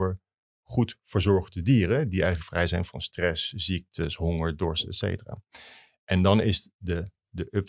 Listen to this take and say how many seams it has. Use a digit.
0